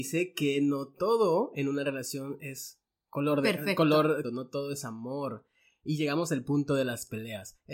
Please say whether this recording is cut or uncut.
cut